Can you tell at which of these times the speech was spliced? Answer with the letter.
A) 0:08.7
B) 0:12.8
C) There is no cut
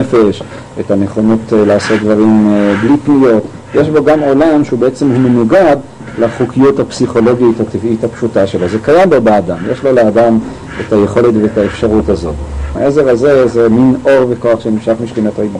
B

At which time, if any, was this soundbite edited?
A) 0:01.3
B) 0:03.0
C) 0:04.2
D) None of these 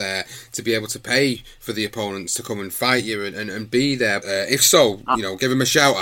C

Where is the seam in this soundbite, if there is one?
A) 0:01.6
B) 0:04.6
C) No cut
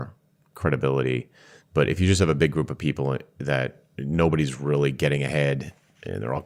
C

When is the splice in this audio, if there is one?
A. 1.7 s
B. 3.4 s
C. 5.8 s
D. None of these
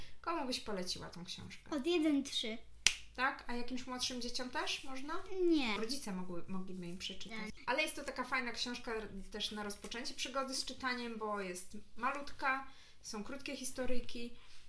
C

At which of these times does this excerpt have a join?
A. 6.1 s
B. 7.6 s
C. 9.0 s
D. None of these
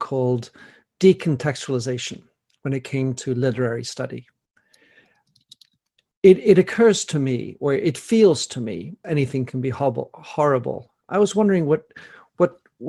C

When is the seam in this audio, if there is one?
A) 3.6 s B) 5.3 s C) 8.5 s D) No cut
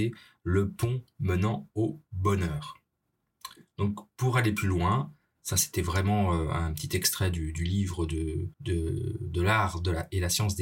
C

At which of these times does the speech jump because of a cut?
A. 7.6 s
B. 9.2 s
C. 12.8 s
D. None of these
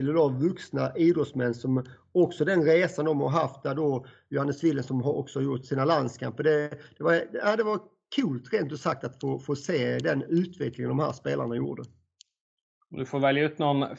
D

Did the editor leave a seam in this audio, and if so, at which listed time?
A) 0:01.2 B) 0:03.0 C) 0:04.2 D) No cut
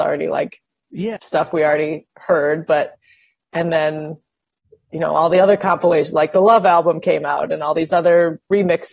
A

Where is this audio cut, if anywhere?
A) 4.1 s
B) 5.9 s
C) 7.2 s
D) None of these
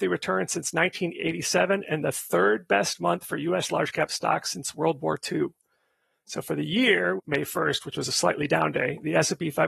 C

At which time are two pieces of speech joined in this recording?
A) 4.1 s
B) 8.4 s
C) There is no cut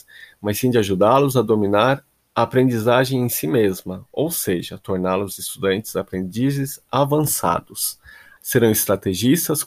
B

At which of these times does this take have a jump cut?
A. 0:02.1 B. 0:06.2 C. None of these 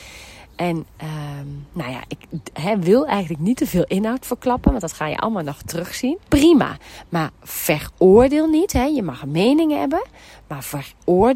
B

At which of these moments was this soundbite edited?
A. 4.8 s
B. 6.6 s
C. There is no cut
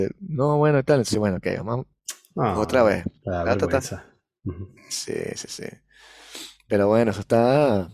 A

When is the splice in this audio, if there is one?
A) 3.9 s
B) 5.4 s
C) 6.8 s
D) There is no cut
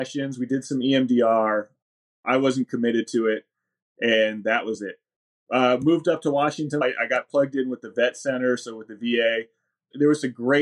C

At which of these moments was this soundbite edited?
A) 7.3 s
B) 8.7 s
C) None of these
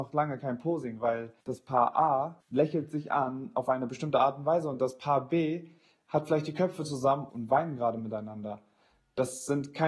A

